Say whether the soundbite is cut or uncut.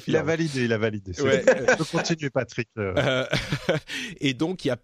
uncut